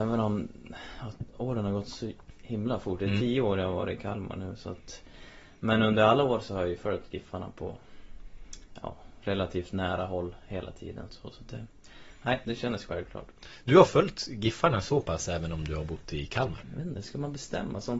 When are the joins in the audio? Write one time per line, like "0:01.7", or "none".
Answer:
0:11.1
0:16.6